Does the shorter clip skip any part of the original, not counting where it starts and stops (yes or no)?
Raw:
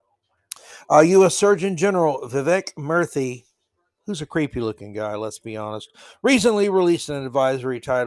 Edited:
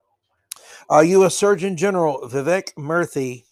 no